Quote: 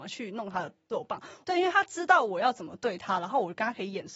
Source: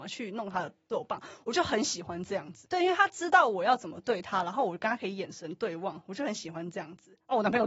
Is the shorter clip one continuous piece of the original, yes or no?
no